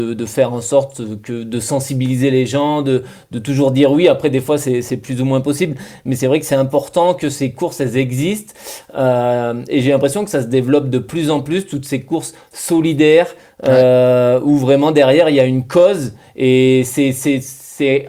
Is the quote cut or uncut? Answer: uncut